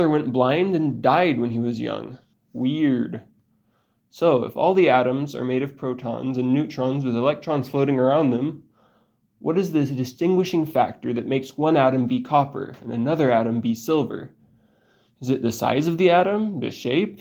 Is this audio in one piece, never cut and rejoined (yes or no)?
no